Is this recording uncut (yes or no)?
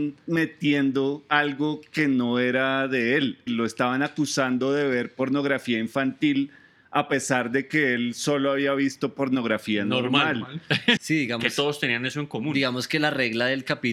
no